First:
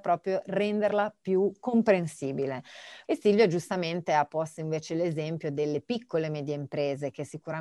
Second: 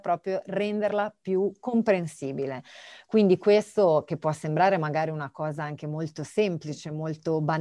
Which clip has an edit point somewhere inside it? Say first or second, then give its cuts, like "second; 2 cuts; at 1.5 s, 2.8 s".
first; 1 cut; at 3.0 s